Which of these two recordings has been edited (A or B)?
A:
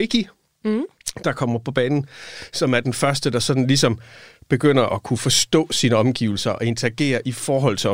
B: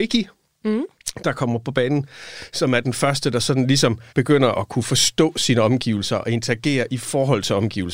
B